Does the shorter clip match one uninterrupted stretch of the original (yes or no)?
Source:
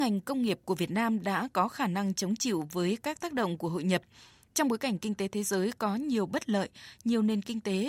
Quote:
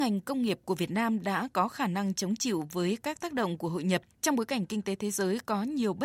no